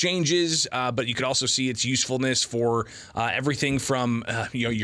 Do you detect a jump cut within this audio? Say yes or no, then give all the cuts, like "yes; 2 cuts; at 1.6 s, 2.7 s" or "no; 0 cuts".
no; 0 cuts